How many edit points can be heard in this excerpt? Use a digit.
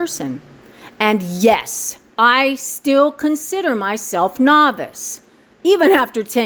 0